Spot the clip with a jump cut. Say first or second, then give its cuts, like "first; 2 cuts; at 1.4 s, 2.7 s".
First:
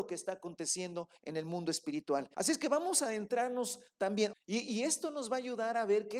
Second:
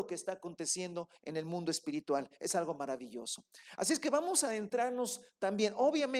first; 2 cuts; at 2.3 s, 4.3 s